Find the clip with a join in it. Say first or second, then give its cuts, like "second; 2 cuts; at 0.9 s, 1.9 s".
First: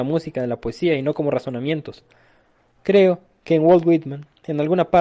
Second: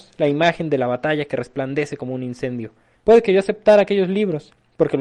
second; 1 cut; at 2.9 s